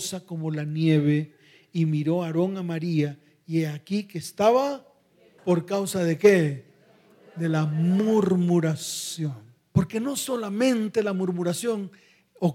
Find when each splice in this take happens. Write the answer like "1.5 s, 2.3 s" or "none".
5.4 s, 9.7 s